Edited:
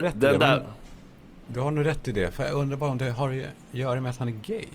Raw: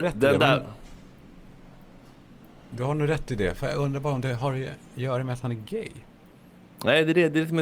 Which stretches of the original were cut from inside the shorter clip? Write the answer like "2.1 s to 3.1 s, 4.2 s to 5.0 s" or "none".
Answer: 1.4 s to 2.7 s